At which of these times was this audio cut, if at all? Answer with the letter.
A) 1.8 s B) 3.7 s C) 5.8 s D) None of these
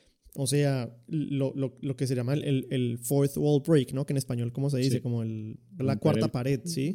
C